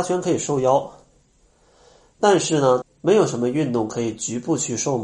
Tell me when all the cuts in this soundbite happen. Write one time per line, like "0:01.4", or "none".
0:02.8